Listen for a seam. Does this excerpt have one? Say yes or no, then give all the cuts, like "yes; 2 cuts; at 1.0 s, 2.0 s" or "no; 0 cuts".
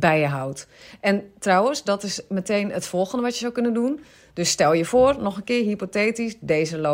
no; 0 cuts